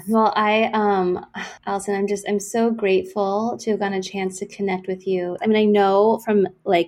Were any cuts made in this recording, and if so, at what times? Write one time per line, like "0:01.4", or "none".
0:01.6
0:05.4

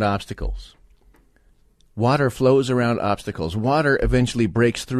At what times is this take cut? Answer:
none

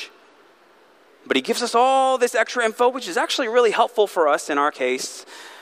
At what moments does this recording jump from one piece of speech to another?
0:01.1

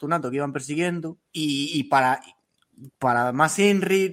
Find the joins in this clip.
0:01.3

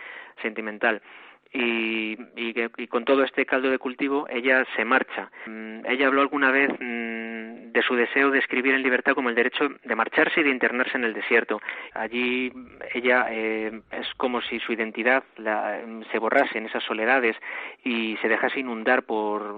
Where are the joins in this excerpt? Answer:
0:11.9

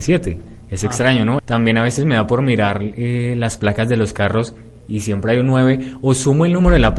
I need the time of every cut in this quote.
0:01.4

